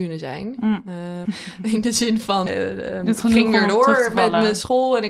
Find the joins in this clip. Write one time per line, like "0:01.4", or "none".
0:01.2
0:02.5